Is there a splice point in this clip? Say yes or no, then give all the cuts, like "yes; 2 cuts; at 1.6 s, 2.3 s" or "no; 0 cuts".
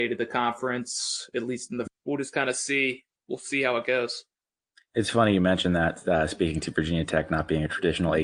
yes; 1 cut; at 1.9 s